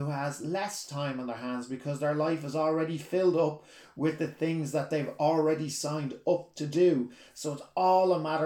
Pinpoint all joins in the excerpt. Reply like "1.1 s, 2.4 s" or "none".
none